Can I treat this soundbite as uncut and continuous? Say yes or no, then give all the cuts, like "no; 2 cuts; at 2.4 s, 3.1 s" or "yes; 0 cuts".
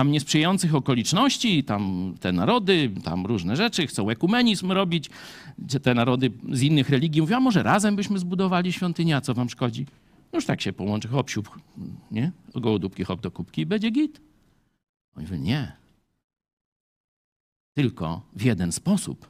yes; 0 cuts